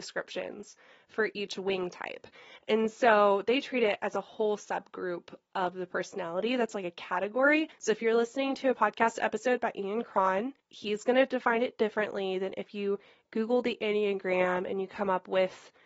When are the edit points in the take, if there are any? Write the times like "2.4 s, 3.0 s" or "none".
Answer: 7.7 s, 10.6 s